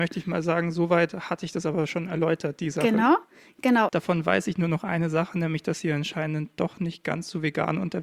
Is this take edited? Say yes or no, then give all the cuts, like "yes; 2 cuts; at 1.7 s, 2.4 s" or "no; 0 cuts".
yes; 1 cut; at 3.9 s